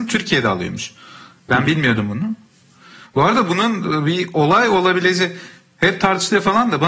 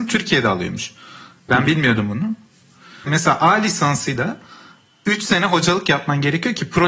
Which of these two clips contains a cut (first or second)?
second